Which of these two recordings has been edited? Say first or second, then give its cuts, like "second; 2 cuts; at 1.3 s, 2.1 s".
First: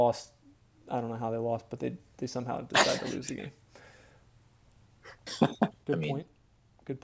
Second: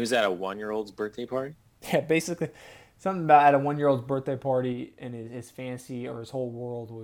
first; 1 cut; at 5.8 s